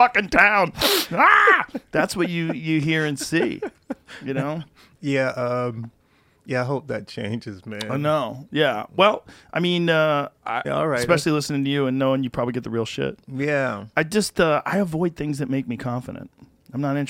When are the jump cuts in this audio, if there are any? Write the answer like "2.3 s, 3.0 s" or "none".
10.6 s